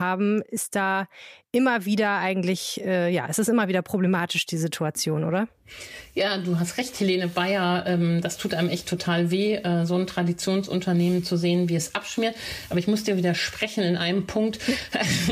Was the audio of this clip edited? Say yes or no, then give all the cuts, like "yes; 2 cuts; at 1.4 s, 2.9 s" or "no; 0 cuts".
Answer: no; 0 cuts